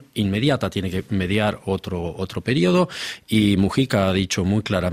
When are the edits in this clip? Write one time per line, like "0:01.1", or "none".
none